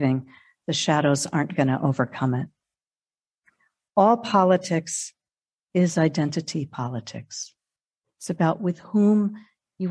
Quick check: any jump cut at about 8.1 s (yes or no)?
no